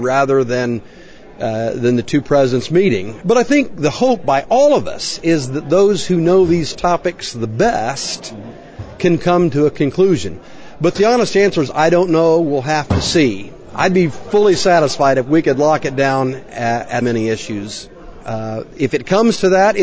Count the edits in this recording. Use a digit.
3